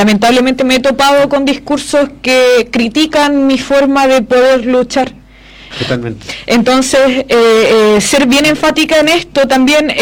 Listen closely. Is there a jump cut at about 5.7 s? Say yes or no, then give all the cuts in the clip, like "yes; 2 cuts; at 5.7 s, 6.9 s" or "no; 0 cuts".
yes; 1 cut; at 5.7 s